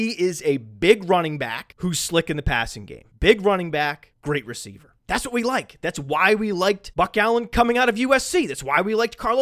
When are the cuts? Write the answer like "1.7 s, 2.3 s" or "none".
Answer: none